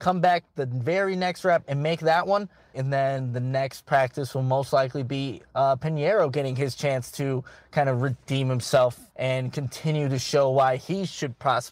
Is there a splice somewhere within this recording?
yes; 2 cuts; at 2.7 s, 9.1 s

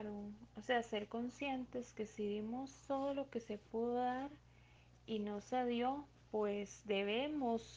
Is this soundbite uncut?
yes; 0 cuts

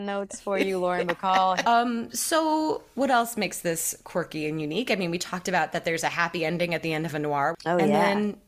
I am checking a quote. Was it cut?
yes; 1 cut; at 1.6 s

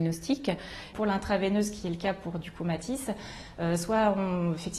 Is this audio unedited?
no; 1 cut; at 0.9 s

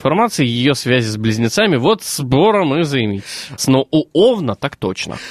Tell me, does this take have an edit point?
yes; 1 cut; at 3.6 s

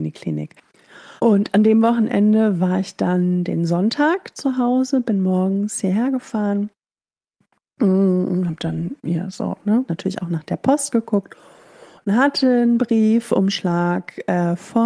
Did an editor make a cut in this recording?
yes; 2 cuts; at 1.2 s, 9.9 s

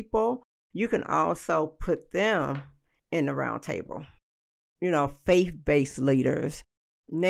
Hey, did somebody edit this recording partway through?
no; 0 cuts

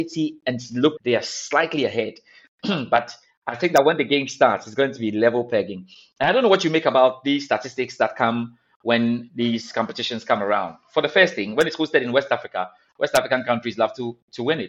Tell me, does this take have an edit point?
yes; 1 cut; at 1.0 s

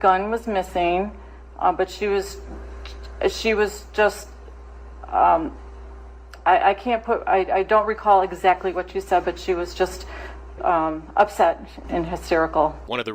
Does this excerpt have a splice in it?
yes; 2 cuts; at 10.6 s, 11.8 s

